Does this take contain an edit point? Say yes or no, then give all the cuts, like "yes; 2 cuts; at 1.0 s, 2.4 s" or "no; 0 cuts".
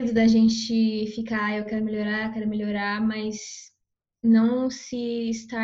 no; 0 cuts